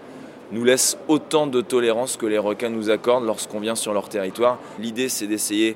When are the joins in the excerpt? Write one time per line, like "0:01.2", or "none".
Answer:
0:04.8

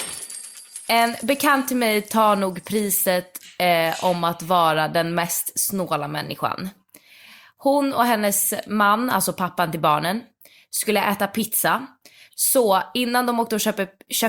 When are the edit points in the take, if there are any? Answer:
none

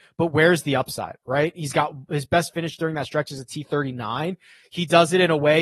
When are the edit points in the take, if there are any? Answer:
none

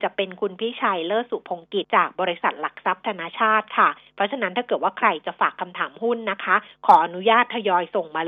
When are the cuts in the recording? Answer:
0:01.8

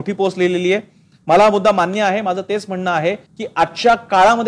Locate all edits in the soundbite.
0:03.3

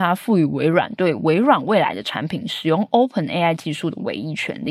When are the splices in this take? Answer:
none

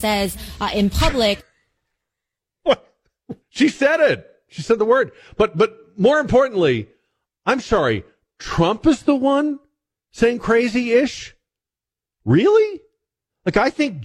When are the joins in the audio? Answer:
0:03.4

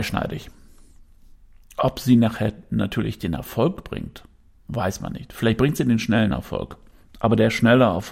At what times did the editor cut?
none

